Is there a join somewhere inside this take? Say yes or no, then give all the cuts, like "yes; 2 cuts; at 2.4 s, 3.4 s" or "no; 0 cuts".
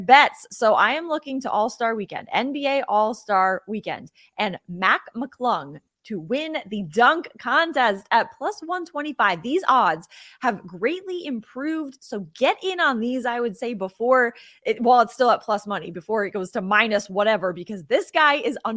no; 0 cuts